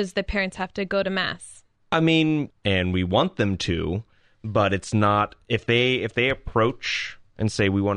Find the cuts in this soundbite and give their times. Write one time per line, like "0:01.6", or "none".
0:02.5

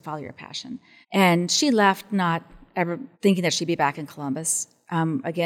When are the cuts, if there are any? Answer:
0:01.0
0:03.1

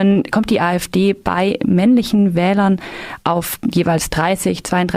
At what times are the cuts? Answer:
none

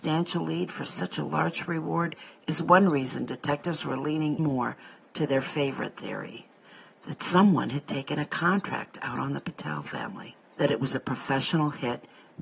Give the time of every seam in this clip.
0:04.4
0:10.5

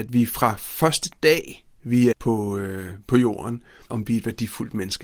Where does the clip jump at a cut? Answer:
0:02.1
0:03.8

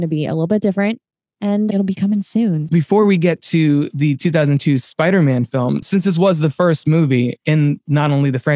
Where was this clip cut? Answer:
0:02.7
0:05.8

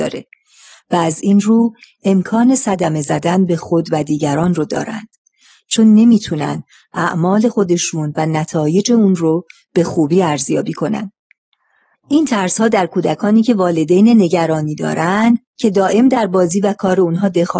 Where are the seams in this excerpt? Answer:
0:11.9

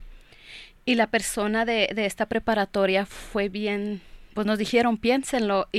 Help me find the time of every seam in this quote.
0:04.3

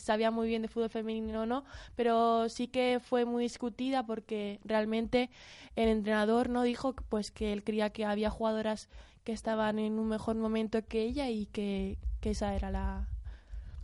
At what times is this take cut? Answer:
none

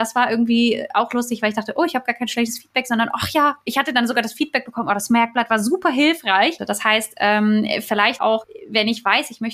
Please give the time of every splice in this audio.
0:06.6
0:08.2

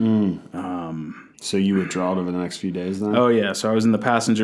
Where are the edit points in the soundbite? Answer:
0:01.3

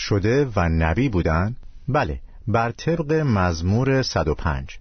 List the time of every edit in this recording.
none

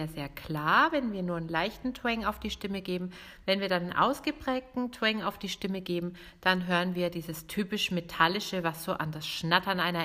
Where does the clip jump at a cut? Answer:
none

